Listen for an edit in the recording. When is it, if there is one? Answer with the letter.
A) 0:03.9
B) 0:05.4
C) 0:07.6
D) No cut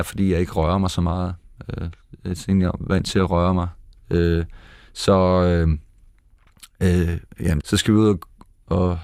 C